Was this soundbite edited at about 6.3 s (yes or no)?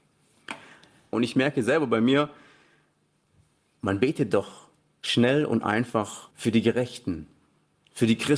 yes